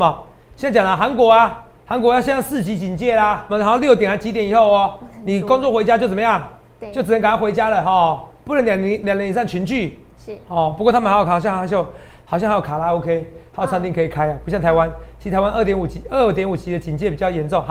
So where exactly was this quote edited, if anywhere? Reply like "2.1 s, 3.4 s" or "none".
3.5 s